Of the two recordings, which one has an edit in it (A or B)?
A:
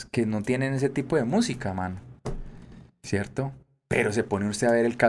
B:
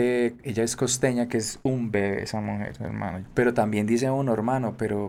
B